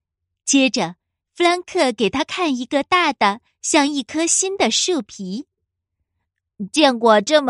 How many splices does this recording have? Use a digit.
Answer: 1